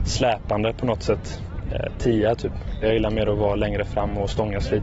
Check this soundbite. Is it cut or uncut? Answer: cut